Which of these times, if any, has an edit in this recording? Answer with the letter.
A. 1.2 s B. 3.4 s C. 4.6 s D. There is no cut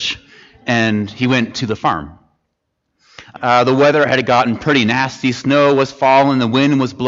B